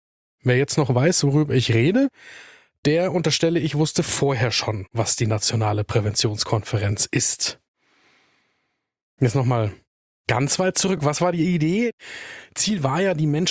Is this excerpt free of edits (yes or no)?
yes